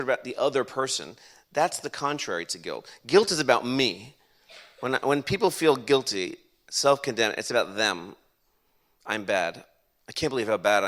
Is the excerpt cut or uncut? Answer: uncut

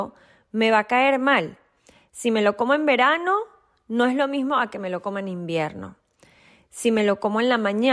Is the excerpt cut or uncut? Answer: uncut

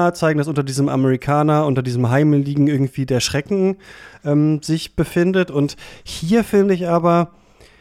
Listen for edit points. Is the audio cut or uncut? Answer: uncut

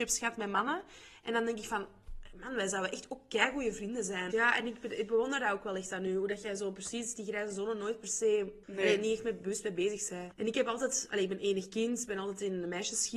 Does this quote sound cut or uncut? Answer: cut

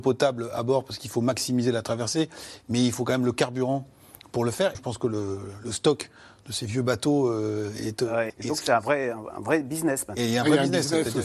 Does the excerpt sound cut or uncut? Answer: cut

